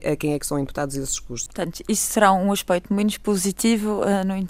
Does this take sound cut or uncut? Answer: cut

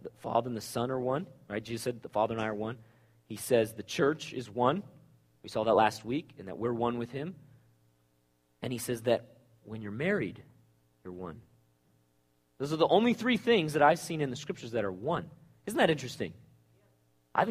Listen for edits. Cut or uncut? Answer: uncut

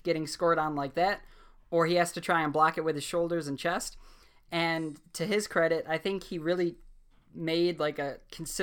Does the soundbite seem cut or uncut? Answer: uncut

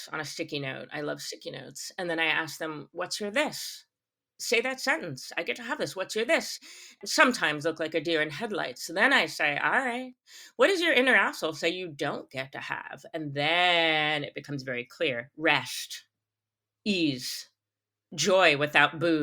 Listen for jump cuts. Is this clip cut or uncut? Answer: uncut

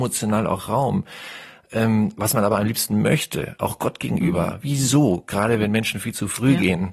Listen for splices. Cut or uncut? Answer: uncut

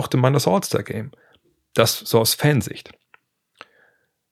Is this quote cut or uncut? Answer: uncut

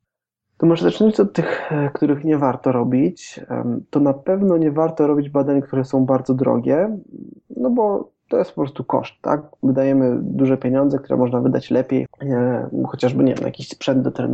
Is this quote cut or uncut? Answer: cut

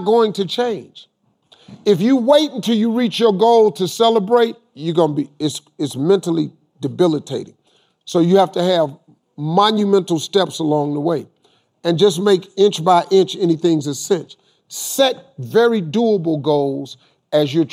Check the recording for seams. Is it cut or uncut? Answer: uncut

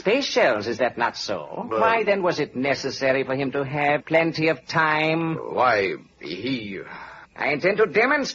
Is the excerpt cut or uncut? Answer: cut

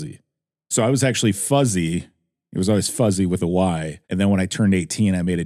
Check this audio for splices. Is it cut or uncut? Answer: cut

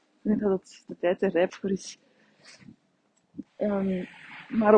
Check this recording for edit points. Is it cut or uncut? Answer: cut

